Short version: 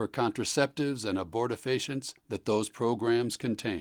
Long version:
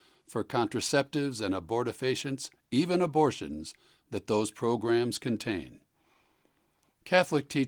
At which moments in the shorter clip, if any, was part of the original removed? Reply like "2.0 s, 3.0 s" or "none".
2.2 s

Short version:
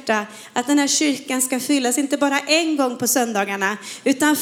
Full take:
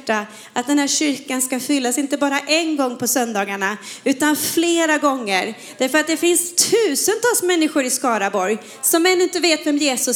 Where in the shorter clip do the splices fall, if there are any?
none

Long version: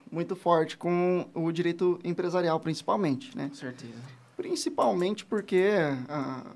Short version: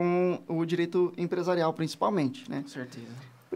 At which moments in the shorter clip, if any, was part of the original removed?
none

